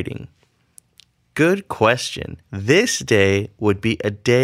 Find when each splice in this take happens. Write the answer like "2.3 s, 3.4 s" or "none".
2.4 s